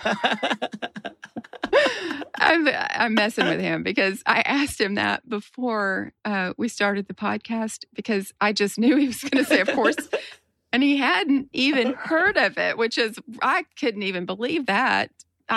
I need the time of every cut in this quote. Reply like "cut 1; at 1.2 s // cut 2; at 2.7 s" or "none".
cut 1; at 6.2 s